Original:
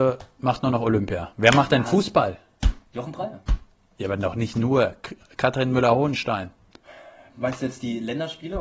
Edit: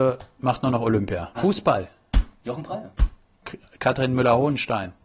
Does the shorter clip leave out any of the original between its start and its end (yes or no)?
yes